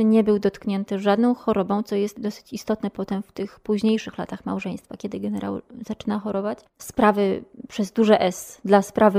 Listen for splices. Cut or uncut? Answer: cut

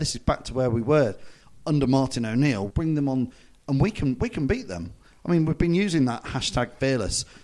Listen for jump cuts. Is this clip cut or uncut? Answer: cut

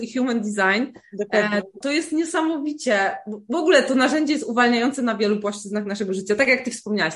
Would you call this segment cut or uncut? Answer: cut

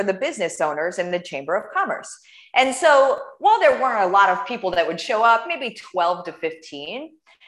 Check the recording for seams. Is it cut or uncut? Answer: uncut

